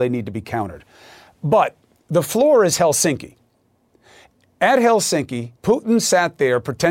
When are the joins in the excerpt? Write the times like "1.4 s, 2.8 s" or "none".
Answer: 5.6 s